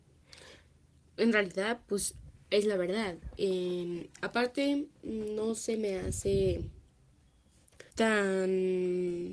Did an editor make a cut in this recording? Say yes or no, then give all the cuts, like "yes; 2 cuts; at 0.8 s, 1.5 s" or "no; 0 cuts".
yes; 1 cut; at 7.9 s